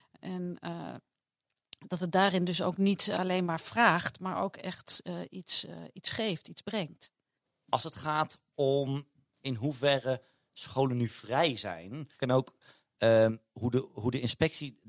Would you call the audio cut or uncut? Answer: cut